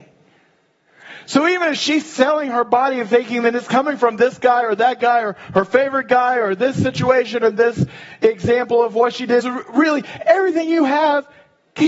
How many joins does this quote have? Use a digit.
1